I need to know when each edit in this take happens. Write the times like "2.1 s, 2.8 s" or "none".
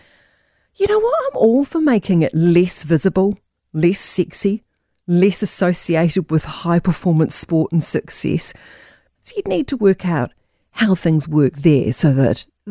9.1 s